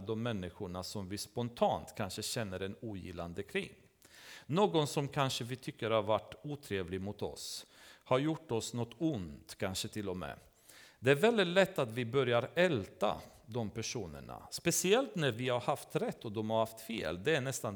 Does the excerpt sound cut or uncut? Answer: uncut